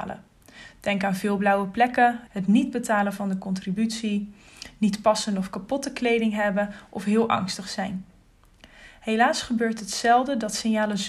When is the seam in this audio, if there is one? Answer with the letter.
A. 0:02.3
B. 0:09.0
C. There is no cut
A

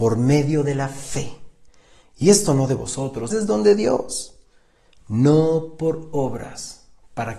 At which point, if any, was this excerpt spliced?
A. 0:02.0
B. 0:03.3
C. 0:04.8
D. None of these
B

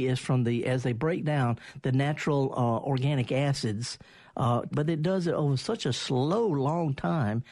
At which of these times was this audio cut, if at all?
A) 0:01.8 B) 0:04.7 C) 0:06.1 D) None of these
B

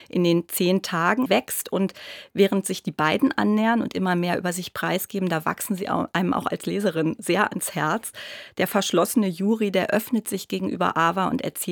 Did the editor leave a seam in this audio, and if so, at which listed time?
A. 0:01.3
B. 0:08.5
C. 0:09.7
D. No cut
A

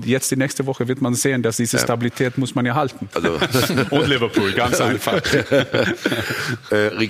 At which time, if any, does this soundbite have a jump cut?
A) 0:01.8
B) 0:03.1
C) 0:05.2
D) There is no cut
B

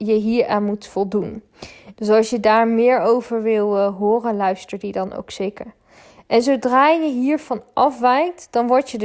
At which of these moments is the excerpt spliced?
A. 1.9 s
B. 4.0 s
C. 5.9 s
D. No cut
A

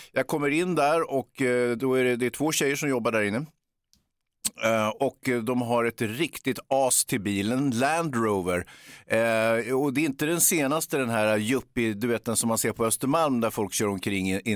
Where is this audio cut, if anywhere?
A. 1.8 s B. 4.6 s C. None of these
C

